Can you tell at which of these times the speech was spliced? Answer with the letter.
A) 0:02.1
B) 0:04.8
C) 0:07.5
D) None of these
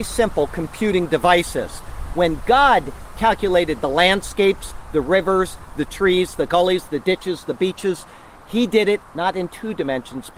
C